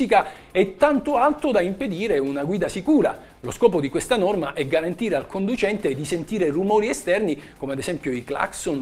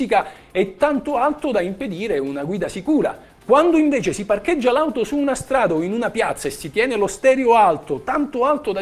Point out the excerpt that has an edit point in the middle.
second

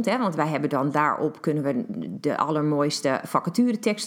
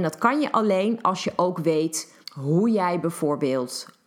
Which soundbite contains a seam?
second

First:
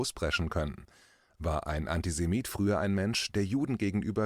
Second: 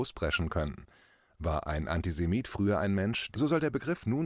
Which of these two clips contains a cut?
second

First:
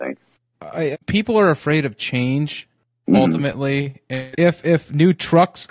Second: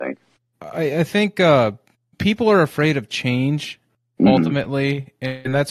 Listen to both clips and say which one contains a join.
first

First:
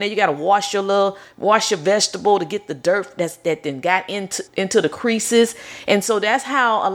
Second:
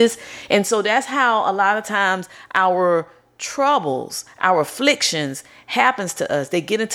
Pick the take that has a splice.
first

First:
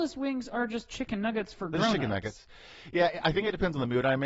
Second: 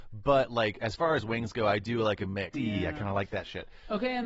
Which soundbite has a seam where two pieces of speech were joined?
second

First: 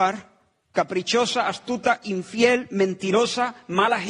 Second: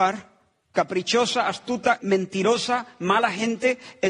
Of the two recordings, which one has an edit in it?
second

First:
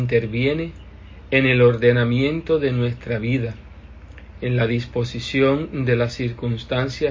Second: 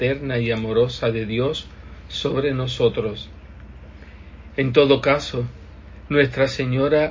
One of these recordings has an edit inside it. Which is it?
second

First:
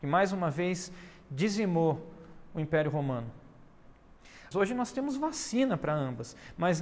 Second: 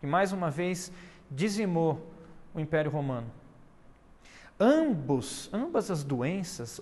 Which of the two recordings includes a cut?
first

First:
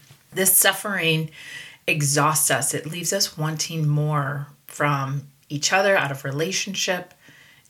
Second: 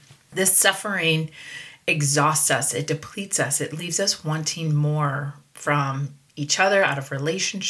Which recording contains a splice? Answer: first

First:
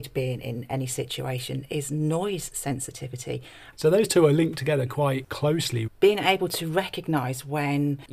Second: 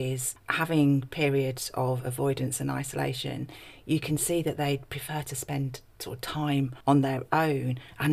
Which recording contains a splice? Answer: first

